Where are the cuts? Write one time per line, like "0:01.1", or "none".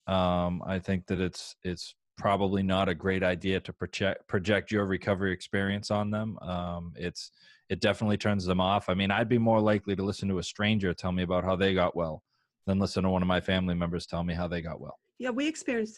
none

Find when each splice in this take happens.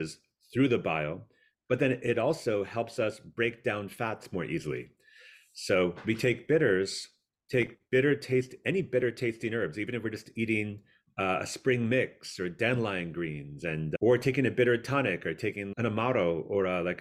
none

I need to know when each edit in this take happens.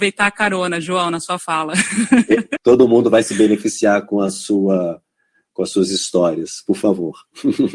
0:02.6

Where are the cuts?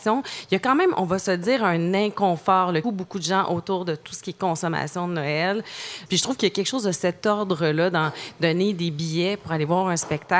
0:02.8
0:06.1

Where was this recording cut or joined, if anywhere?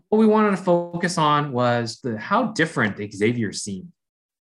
0:02.0

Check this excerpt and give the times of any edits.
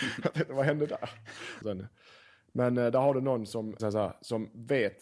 0:01.6
0:03.8

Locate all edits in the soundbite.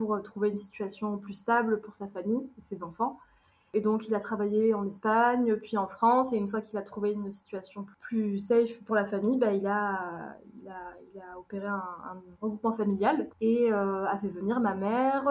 0:13.3

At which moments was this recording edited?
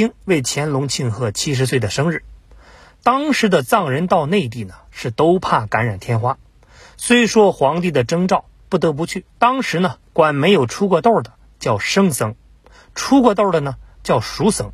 0:09.3

